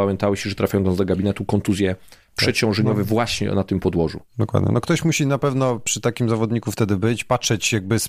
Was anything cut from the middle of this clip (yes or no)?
no